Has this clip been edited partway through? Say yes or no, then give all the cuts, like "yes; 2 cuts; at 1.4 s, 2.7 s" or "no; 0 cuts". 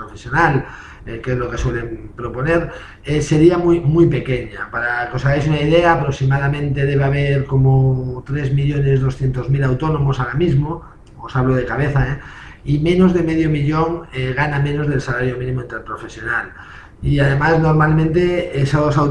no; 0 cuts